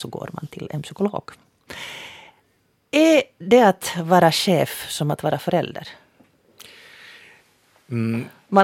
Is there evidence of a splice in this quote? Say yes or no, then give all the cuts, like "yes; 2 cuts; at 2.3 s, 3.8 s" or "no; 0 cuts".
no; 0 cuts